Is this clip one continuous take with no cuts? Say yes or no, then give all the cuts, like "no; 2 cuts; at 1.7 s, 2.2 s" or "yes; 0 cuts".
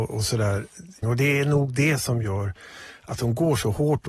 no; 1 cut; at 1.0 s